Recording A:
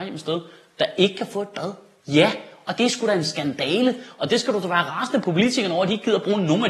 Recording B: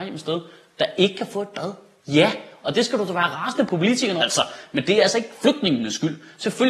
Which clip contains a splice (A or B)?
B